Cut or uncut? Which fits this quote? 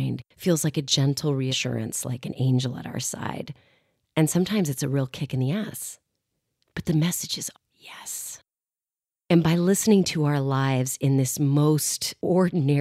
cut